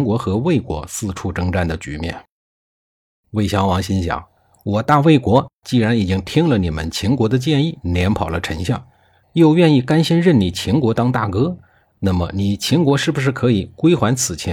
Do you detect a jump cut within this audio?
no; 0 cuts

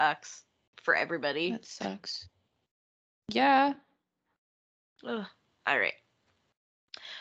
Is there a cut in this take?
no; 0 cuts

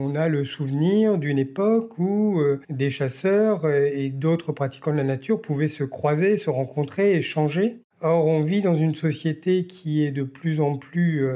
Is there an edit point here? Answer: no; 0 cuts

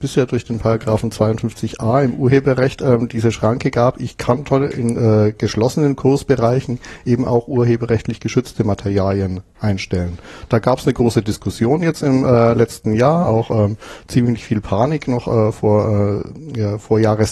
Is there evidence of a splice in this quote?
no; 0 cuts

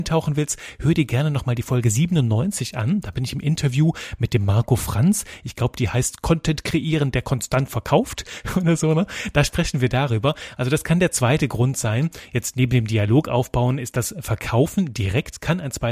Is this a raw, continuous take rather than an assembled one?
yes; 0 cuts

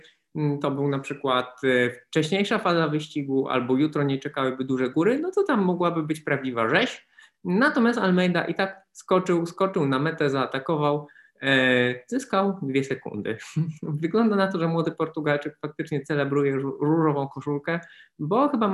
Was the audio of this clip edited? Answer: no; 0 cuts

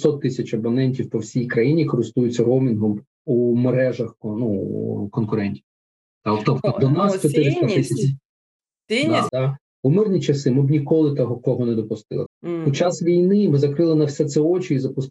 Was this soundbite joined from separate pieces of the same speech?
yes; 2 cuts; at 9.3 s, 12.3 s

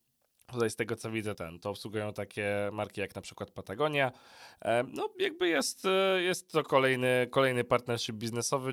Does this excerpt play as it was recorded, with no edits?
no; 1 cut; at 1.3 s

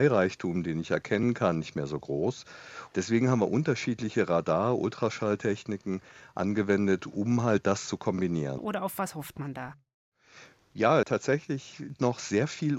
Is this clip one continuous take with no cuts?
no; 3 cuts; at 2.9 s, 8.6 s, 11.0 s

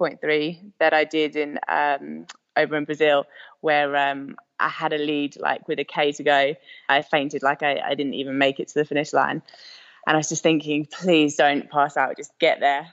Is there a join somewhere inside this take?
yes; 2 cuts; at 6.9 s, 11.4 s

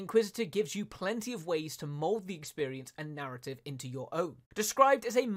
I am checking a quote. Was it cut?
yes; 1 cut; at 4.4 s

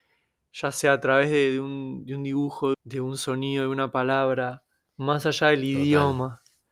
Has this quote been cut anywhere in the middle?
yes; 1 cut; at 2.7 s

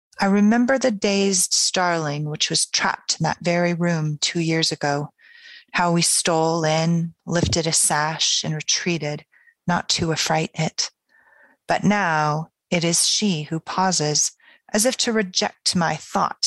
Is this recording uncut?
no; 1 cut; at 11.6 s

